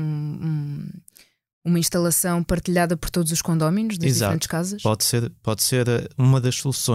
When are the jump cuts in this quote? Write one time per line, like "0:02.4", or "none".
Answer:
none